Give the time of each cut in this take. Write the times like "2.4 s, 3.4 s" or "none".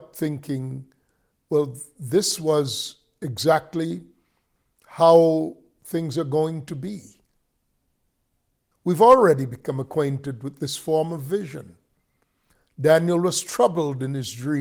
8.7 s